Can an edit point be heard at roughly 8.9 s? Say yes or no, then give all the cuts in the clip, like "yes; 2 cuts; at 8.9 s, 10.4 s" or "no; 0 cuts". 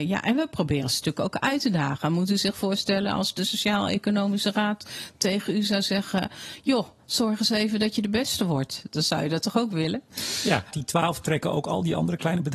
no; 1 cut; at 10.7 s